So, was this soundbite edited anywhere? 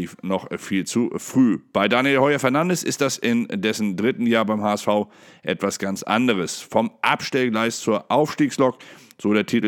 no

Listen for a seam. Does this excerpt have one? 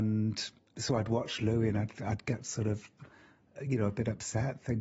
no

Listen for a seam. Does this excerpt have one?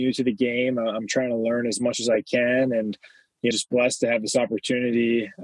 yes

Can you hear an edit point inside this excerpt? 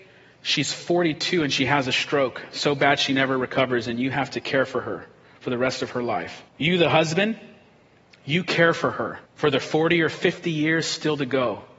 yes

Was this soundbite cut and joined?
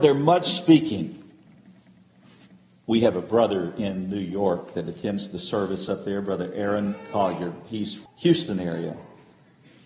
yes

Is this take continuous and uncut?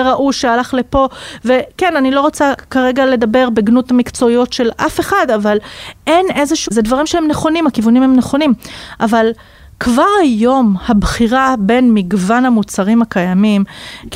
no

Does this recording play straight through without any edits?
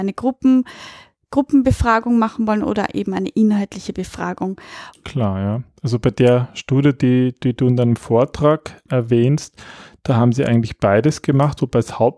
no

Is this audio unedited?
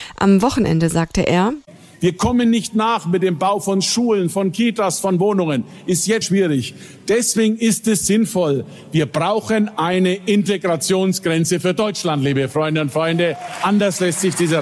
no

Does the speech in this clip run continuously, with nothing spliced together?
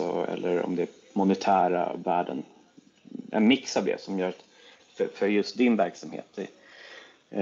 yes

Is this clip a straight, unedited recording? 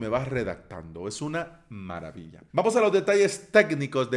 no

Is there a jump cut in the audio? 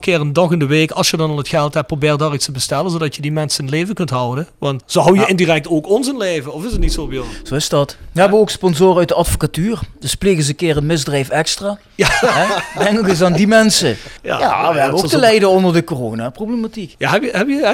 no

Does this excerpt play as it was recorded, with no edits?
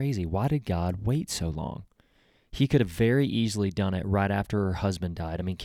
yes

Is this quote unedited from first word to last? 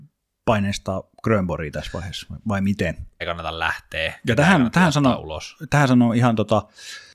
no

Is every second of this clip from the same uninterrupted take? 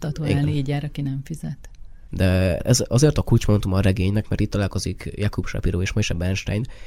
no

